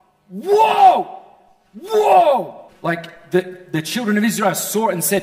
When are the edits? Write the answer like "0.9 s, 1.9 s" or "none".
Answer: 2.7 s